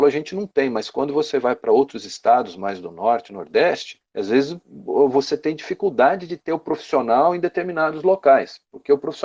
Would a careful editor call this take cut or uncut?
uncut